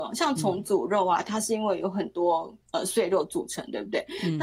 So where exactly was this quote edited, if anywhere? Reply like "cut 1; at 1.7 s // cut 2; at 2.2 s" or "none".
cut 1; at 2.6 s